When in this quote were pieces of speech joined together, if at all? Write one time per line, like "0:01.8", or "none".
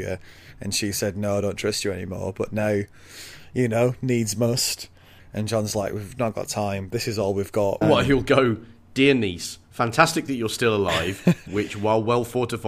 0:05.2
0:07.8
0:11.5